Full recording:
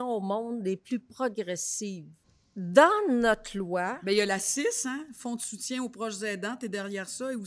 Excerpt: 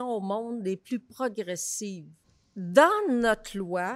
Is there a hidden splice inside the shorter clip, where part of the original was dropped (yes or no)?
no